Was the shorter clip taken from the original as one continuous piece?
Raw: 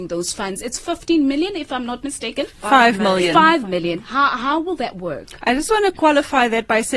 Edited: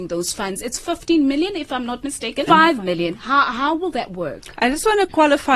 no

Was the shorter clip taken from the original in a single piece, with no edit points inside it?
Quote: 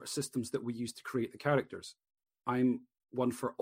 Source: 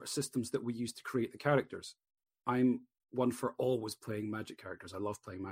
yes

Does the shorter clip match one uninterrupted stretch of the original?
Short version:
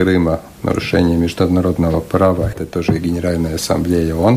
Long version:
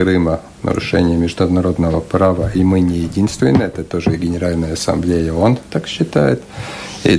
no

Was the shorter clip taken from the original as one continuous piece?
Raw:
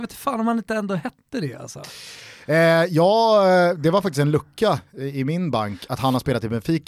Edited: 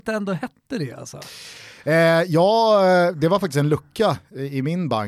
yes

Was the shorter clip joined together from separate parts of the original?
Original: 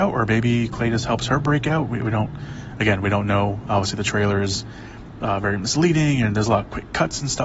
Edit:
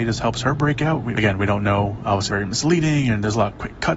yes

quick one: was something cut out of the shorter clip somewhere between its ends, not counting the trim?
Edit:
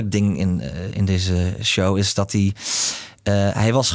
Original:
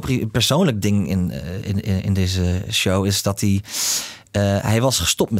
yes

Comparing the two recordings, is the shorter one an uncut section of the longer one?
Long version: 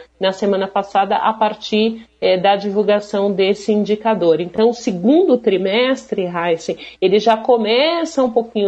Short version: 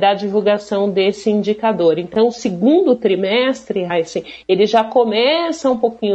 no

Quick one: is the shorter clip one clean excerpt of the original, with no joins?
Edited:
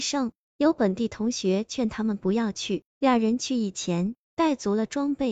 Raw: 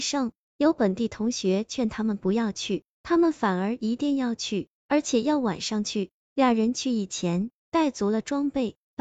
no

